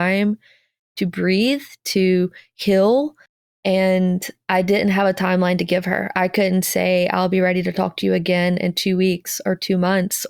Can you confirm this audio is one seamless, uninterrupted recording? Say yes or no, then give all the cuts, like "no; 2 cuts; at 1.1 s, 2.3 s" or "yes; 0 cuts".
yes; 0 cuts